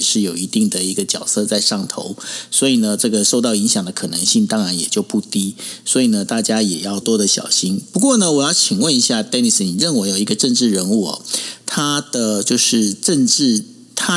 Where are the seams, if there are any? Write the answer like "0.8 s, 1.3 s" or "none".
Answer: 7.0 s